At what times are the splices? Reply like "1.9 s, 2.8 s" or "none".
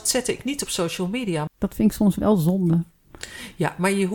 1.5 s